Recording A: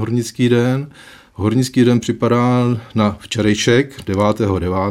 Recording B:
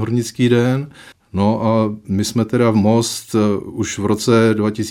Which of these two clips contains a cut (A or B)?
B